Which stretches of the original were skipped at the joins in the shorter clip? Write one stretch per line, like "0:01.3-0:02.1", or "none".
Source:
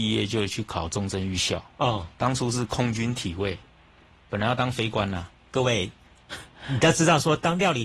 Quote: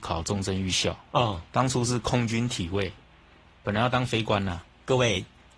none